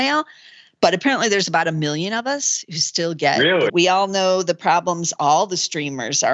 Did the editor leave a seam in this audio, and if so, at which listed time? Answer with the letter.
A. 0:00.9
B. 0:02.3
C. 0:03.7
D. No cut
C